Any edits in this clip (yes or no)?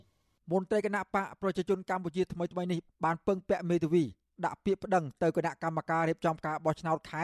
no